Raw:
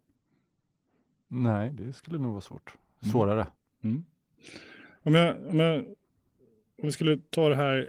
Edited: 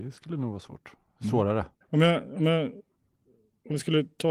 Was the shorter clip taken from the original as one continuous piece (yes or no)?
no